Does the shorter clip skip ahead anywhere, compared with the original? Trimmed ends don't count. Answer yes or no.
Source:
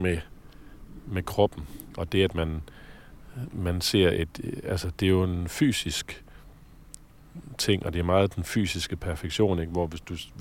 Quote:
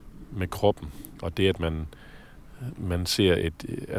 no